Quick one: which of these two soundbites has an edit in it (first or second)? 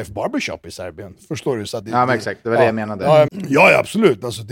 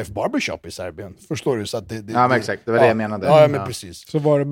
first